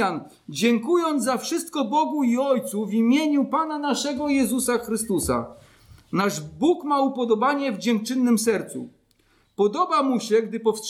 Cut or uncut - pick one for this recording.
uncut